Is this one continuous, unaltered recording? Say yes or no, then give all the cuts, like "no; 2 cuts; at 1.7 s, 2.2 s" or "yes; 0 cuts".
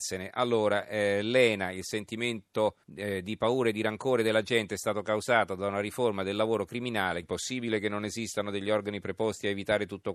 no; 2 cuts; at 2.8 s, 7.2 s